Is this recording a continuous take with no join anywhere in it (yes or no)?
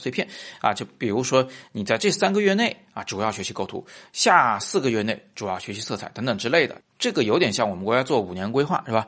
yes